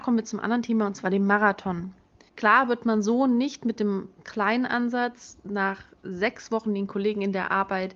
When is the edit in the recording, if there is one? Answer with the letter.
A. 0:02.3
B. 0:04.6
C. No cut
A